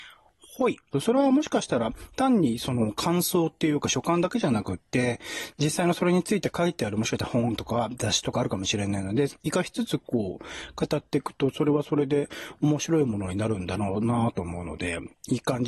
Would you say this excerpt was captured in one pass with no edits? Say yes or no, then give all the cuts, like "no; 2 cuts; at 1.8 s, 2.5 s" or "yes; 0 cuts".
no; 2 cuts; at 0.9 s, 9.3 s